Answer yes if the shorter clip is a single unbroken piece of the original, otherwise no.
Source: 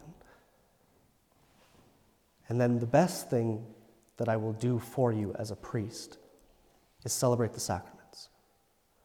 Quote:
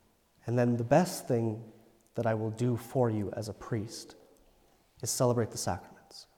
yes